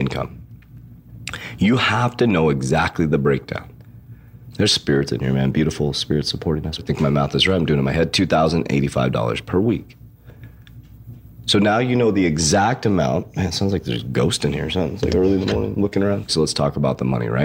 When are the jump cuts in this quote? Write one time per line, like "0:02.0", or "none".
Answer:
0:04.5
0:06.8
0:16.3